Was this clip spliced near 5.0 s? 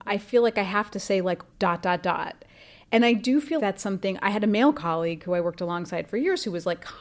no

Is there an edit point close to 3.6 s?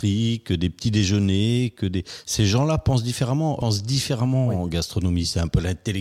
yes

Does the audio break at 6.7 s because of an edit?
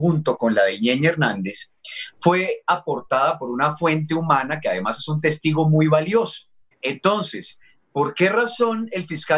yes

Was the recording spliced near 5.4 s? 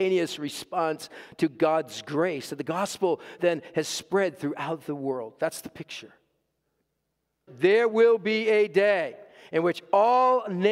no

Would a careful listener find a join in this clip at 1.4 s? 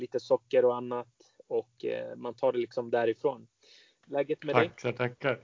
no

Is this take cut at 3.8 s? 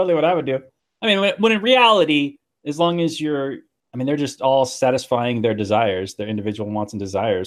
yes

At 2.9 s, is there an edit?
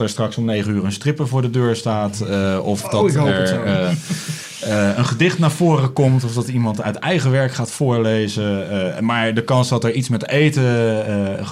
no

